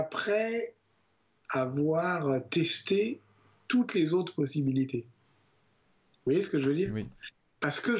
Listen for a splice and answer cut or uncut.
uncut